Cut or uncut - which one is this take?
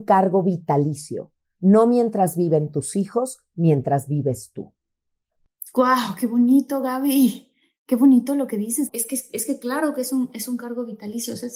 cut